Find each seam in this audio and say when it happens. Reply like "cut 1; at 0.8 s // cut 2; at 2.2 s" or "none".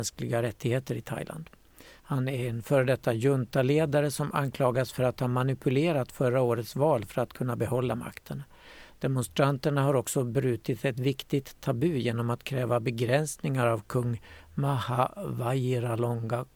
cut 1; at 2.0 s